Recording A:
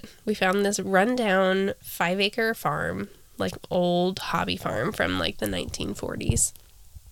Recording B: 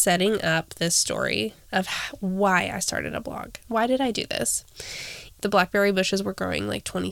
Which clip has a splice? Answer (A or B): B